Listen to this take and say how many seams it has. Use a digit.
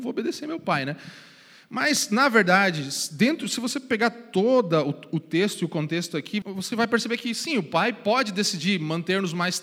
1